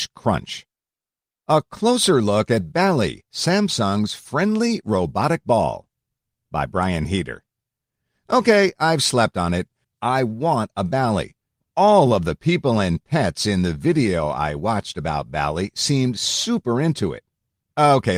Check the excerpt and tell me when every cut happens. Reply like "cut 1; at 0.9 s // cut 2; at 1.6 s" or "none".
cut 1; at 9.8 s

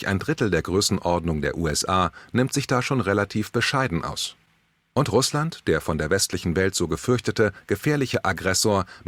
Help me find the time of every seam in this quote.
none

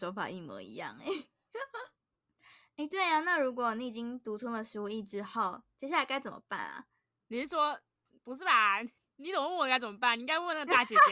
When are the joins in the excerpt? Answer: none

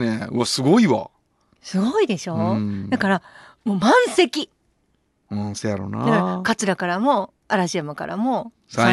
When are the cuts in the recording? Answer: none

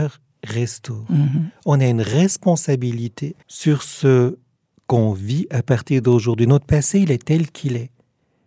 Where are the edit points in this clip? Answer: cut 1; at 3.4 s

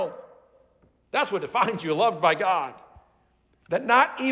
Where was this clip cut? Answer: none

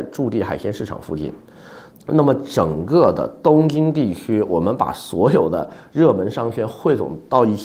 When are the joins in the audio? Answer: cut 1; at 1.9 s

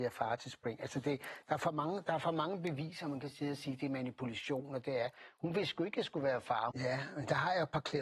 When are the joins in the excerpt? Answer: cut 1; at 6.7 s

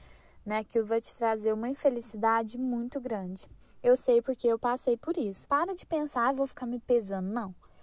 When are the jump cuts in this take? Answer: cut 1; at 5.5 s

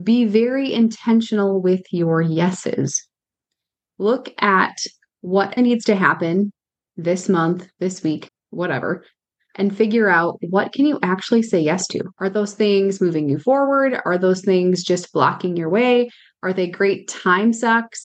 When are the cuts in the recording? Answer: cut 1; at 5.6 s // cut 2; at 8.3 s // cut 3; at 12.1 s

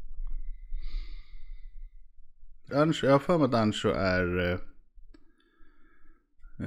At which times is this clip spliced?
cut 1; at 2.7 s

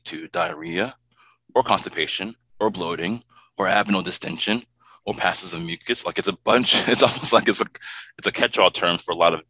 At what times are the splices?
none

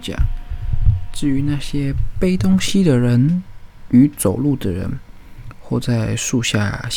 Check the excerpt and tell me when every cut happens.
cut 1; at 5.5 s

